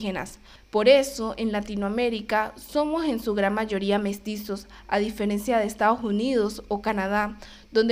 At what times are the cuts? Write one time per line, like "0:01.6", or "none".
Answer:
none